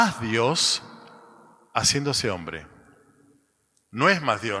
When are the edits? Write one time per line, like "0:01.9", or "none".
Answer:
none